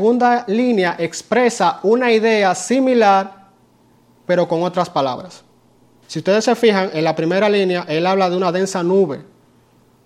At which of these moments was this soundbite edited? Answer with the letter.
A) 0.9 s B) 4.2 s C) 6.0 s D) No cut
C